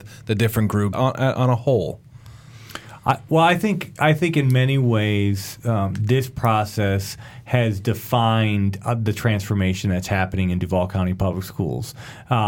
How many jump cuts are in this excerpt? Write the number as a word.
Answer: one